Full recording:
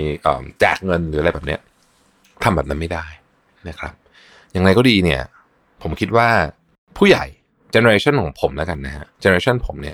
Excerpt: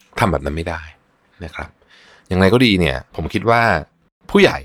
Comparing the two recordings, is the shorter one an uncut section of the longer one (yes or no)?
no